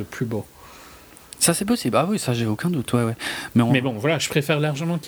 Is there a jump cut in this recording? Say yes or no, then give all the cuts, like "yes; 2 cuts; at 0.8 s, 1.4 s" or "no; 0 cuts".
no; 0 cuts